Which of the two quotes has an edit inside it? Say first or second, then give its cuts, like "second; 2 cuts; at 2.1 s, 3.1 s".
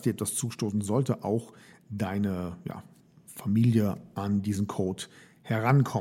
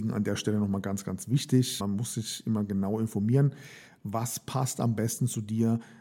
second; 1 cut; at 1.8 s